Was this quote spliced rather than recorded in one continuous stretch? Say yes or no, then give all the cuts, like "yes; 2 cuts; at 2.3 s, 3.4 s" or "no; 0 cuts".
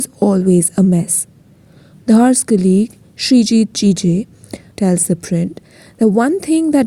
yes; 2 cuts; at 1.9 s, 4.7 s